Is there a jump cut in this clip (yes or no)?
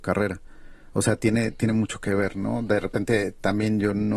no